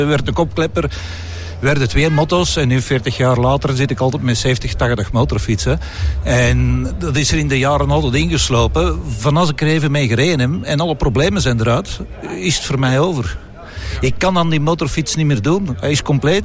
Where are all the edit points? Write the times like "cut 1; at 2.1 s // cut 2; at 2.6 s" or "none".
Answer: none